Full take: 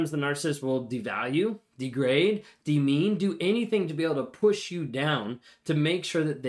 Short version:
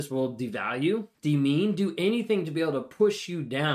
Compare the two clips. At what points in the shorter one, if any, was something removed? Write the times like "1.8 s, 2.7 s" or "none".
1.1 s